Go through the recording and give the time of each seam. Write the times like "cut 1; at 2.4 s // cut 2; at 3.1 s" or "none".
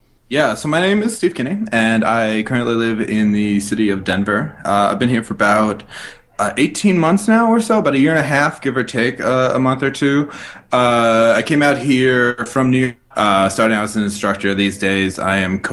cut 1; at 13.1 s